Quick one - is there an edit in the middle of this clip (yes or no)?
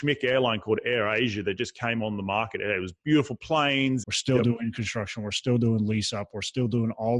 yes